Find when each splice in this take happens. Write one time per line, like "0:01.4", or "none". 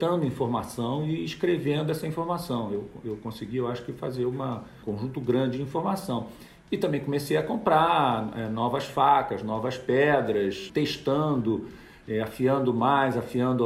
none